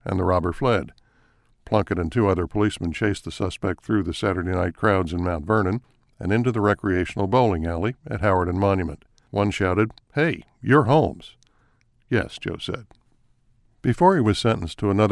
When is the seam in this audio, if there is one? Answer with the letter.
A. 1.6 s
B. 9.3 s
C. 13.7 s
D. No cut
B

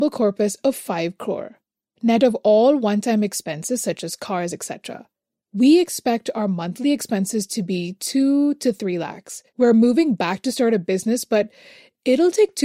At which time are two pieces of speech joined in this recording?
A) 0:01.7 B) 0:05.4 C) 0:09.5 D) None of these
C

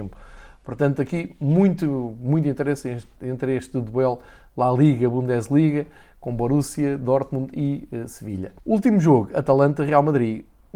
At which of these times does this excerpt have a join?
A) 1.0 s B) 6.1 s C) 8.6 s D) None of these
C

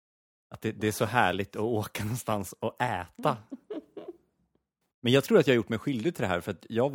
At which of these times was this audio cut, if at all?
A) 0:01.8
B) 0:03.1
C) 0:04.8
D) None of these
C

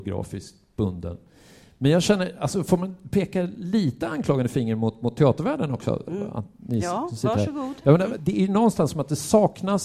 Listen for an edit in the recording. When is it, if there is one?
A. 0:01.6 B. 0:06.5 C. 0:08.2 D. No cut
C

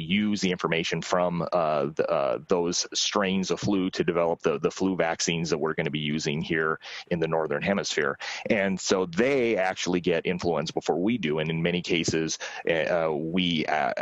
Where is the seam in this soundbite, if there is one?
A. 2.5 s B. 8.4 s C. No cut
B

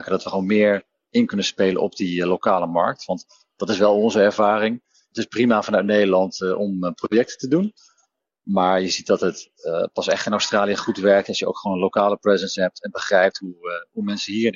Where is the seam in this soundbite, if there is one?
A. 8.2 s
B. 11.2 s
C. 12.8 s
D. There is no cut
D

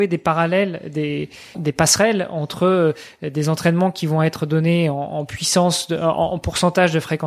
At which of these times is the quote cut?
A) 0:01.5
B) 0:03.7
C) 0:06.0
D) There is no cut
A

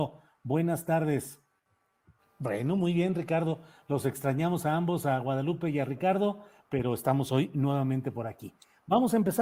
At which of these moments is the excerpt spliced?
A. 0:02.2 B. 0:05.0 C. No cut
A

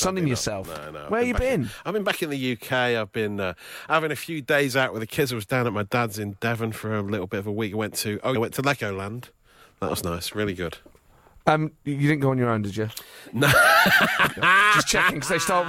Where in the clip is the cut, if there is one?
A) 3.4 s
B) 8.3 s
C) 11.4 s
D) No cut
B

